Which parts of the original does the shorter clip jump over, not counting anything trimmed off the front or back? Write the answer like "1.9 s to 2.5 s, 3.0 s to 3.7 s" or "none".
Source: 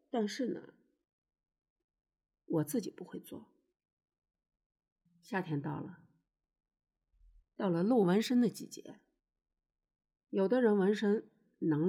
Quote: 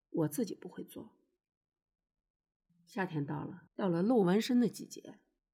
6.0 s to 7.5 s